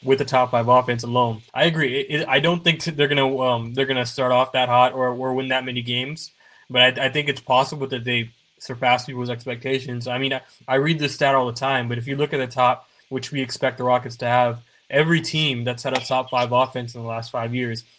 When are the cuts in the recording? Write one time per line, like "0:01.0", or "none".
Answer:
0:01.5
0:13.0